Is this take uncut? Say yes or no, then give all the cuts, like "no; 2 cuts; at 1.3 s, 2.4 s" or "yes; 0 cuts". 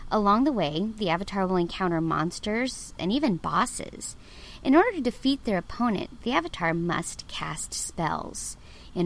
no; 1 cut; at 3.0 s